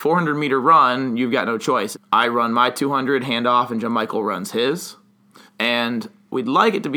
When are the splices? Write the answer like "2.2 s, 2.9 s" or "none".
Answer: 1.9 s, 5.5 s